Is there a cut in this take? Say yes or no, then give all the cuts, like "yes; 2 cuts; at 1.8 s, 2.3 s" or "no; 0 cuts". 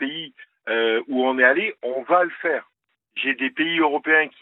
no; 0 cuts